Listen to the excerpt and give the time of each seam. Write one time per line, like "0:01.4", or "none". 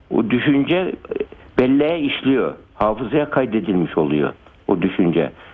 none